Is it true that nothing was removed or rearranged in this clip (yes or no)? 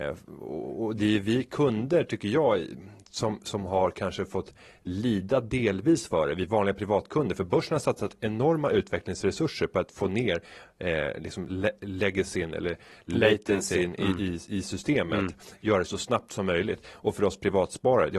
yes